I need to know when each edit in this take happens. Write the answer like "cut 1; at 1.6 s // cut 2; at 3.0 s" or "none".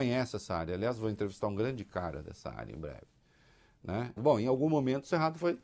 cut 1; at 4.2 s